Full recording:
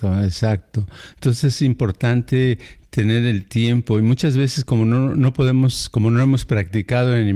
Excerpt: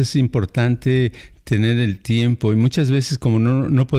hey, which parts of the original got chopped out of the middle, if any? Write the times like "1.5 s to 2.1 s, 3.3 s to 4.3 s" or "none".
none